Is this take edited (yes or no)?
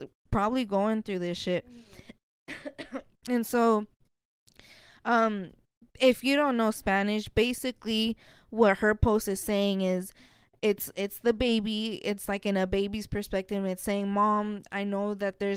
no